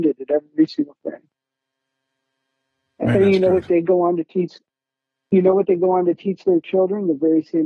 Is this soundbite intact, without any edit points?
yes; 0 cuts

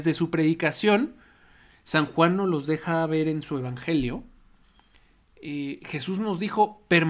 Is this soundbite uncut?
yes; 0 cuts

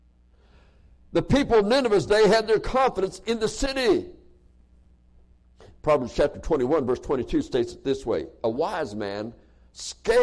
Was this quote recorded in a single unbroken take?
yes; 0 cuts

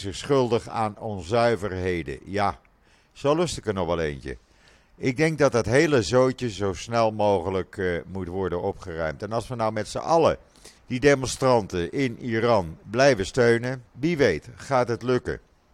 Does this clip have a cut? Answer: yes; 2 cuts; at 10.8 s, 13.9 s

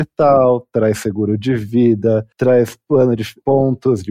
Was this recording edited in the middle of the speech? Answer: yes; 1 cut; at 2.3 s

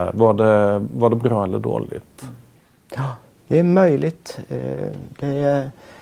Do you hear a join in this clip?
no; 0 cuts

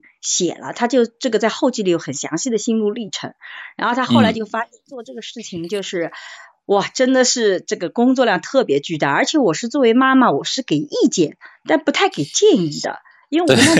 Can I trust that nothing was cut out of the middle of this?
yes; 0 cuts

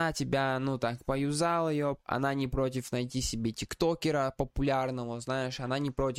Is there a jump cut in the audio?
no; 0 cuts

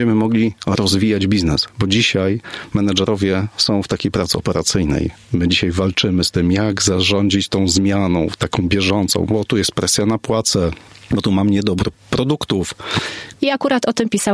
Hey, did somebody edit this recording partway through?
yes; 1 cut; at 13.3 s

